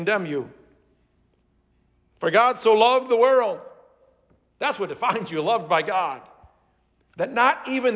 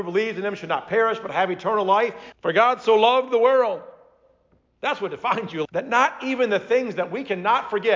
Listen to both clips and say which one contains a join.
second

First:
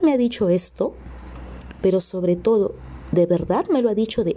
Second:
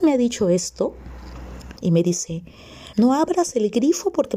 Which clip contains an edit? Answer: second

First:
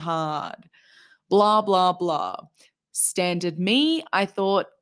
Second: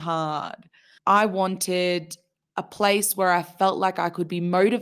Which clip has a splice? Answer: second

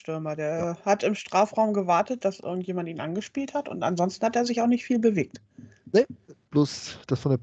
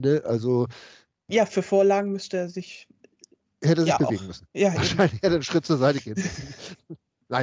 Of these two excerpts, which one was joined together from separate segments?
first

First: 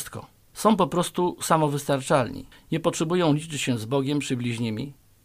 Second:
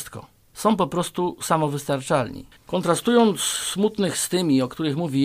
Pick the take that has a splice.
second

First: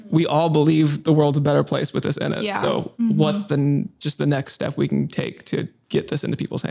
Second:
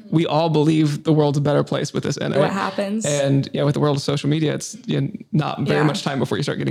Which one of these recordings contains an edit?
second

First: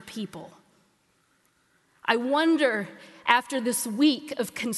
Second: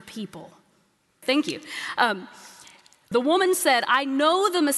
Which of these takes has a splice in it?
second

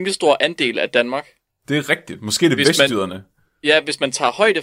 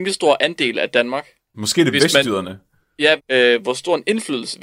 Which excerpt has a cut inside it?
second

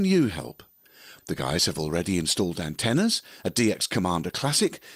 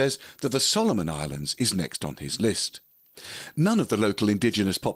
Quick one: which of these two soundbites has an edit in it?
first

